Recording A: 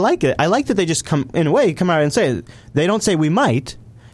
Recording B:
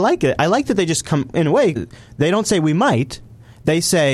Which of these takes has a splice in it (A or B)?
B